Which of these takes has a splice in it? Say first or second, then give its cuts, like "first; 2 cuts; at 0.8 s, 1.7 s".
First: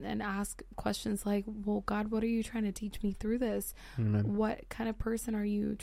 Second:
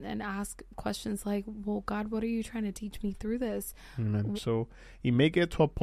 second; 1 cut; at 4.3 s